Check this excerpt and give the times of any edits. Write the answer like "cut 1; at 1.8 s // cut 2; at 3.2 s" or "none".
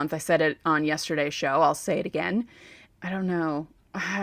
cut 1; at 2.9 s